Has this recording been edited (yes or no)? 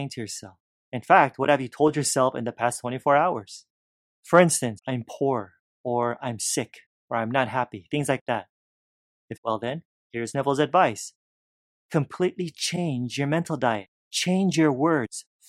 yes